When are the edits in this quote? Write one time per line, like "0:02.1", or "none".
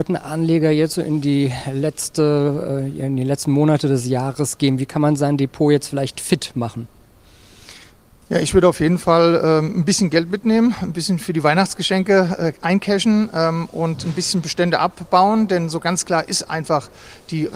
none